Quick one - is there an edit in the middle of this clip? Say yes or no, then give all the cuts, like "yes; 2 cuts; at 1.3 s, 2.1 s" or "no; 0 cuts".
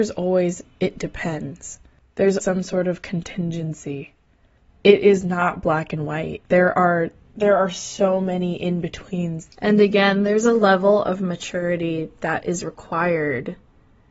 yes; 2 cuts; at 2.4 s, 9.5 s